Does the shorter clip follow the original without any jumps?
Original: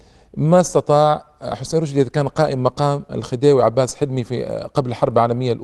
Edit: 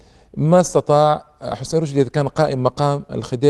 yes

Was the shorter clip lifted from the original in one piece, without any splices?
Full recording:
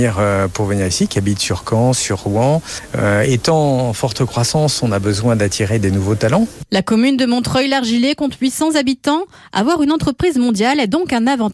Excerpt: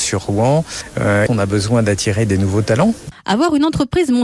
no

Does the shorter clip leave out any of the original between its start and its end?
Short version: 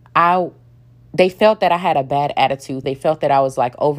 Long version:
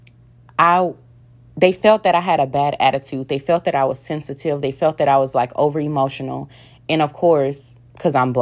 yes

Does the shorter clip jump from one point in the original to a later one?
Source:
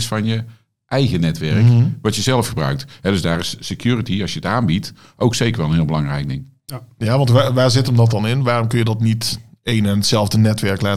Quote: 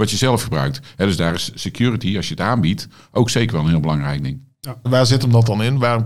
yes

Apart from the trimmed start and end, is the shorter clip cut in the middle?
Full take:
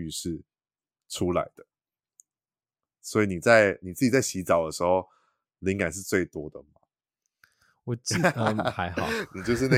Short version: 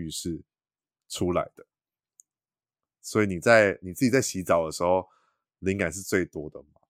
no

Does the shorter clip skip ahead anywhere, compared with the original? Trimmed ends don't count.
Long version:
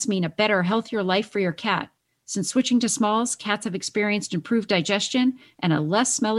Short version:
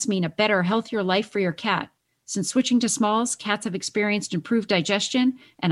no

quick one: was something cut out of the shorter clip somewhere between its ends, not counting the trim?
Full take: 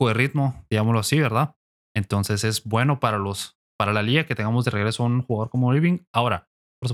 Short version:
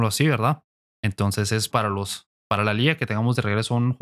yes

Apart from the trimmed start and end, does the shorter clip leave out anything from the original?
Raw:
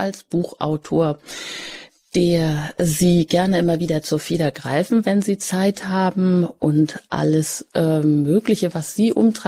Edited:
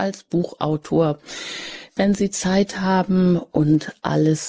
yes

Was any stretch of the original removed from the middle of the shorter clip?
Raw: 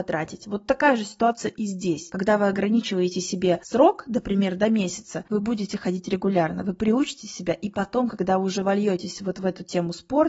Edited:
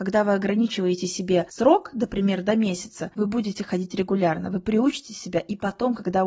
no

